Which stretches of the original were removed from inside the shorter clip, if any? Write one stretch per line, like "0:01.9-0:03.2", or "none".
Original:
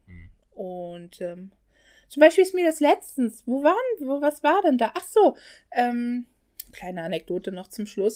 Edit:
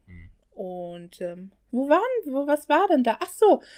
0:01.7-0:03.4